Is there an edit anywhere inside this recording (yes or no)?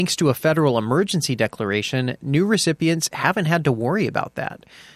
no